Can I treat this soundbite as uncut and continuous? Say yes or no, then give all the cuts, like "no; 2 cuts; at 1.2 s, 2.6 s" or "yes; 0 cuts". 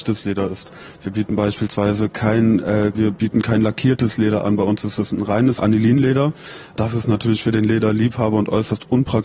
no; 1 cut; at 2.9 s